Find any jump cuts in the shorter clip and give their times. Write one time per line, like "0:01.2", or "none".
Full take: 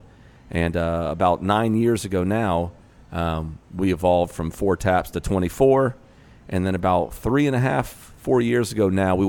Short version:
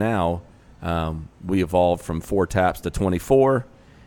none